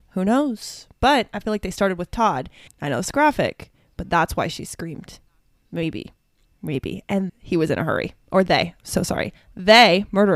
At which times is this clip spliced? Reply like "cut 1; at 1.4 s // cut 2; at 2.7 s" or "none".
cut 1; at 2.7 s // cut 2; at 7.3 s